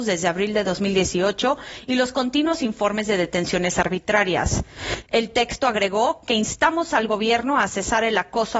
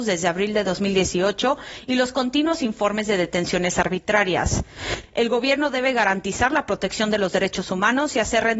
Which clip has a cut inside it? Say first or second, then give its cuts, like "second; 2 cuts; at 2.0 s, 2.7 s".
first; 1 cut; at 5.0 s